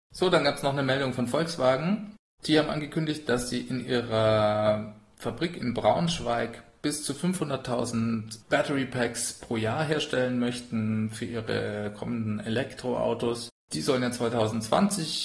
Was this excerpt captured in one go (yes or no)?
yes